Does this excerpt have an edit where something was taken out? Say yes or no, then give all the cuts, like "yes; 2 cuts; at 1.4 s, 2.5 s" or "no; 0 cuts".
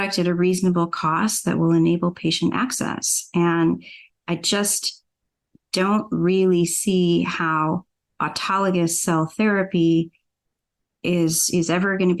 no; 0 cuts